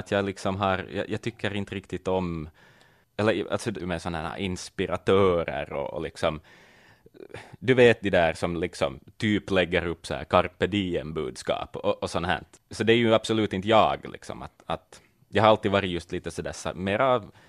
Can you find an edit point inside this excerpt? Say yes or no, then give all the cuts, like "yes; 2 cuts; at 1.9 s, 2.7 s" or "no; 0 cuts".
yes; 1 cut; at 3.8 s